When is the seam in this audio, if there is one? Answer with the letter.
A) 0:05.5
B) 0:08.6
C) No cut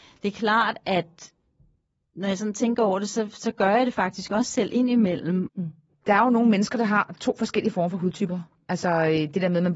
A